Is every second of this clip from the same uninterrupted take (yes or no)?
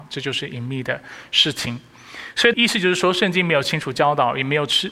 no